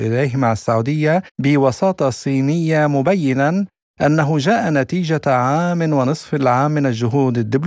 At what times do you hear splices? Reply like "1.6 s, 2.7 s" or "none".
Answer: 1.3 s